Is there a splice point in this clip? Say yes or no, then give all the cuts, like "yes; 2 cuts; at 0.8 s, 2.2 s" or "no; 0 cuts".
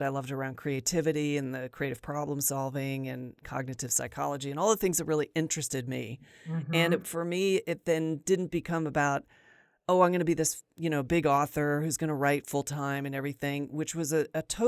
no; 0 cuts